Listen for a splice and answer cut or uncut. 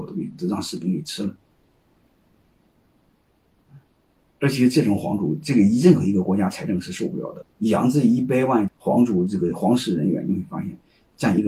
cut